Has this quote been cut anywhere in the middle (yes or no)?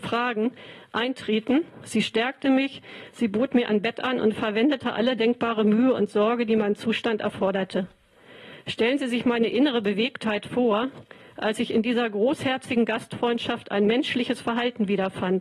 no